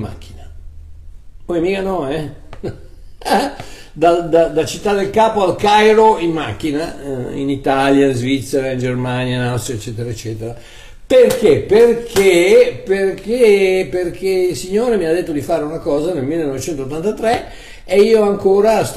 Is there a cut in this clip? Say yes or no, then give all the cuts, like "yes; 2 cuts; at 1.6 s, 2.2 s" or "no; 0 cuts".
no; 0 cuts